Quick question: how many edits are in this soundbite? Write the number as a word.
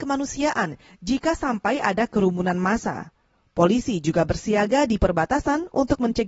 zero